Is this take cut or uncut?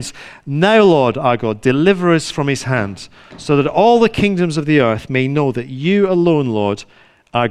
uncut